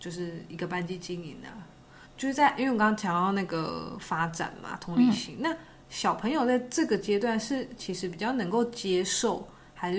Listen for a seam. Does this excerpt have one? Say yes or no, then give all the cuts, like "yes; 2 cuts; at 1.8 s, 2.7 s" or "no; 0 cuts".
yes; 1 cut; at 2.1 s